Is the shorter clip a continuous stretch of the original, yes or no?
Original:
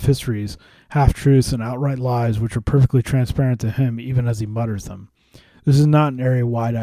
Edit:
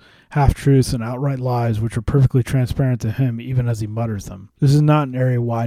no